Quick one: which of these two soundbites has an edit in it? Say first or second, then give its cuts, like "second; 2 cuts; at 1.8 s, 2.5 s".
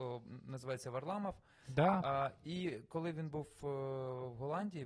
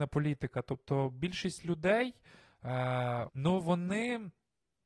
second; 1 cut; at 3.3 s